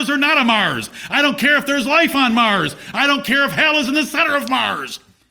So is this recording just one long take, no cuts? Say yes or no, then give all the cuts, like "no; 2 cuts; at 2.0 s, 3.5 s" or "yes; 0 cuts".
no; 2 cuts; at 1.1 s, 2.9 s